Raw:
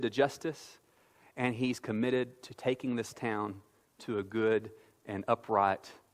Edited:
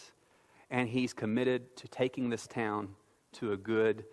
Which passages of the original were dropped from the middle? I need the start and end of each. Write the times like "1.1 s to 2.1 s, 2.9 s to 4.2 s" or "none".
none